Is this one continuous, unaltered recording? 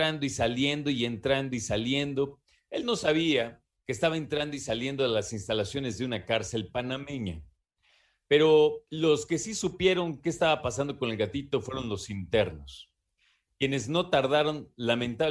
no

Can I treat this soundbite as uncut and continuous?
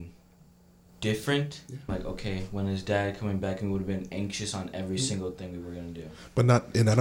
no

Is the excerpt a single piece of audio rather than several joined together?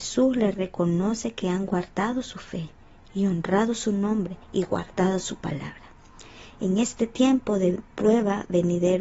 no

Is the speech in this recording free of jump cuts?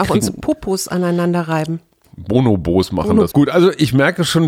no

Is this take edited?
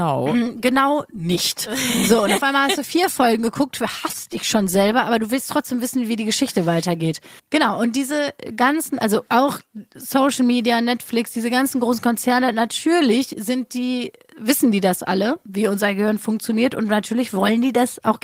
yes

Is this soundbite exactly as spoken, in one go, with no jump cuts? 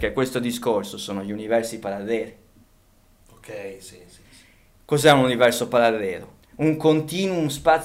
no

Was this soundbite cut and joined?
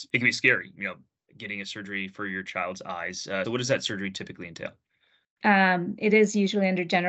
yes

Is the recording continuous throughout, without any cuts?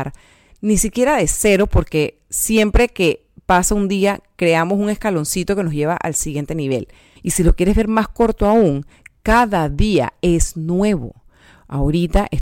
no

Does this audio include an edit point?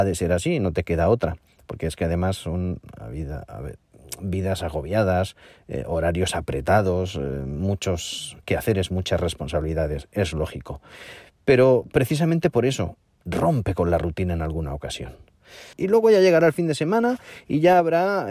yes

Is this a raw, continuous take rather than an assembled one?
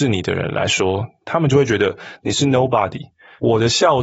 yes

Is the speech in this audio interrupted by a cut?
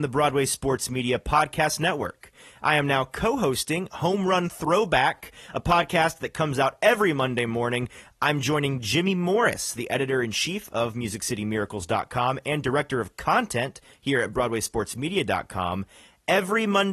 no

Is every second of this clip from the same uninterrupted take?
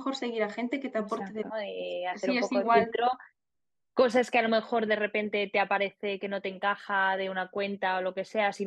no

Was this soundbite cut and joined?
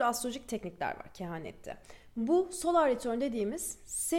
no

